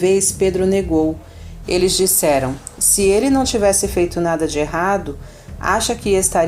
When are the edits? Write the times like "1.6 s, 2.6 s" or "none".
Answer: 1.6 s